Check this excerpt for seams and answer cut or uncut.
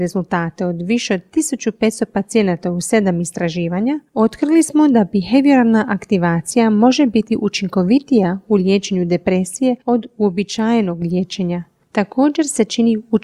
uncut